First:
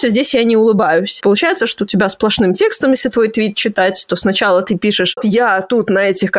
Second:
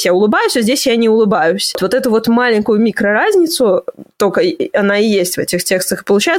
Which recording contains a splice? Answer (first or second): first